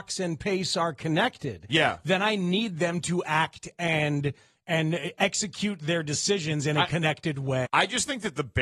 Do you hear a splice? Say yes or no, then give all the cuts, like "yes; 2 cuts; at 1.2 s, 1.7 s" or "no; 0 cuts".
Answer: yes; 1 cut; at 7.6 s